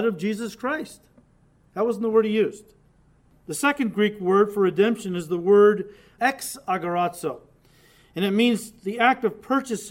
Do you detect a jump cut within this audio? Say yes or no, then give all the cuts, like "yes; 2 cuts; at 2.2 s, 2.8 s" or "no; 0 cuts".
no; 0 cuts